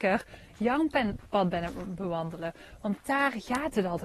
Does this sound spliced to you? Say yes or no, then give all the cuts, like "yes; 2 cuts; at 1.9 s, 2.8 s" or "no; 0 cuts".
no; 0 cuts